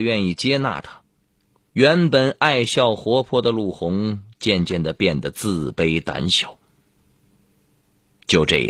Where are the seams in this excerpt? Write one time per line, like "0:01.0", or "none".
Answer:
0:01.7